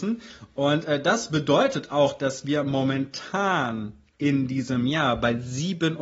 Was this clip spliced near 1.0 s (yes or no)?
no